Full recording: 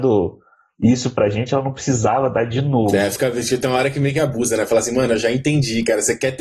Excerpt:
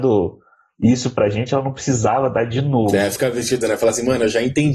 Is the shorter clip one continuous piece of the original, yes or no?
no